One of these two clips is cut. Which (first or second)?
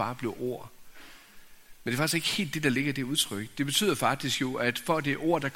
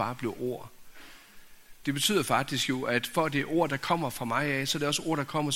second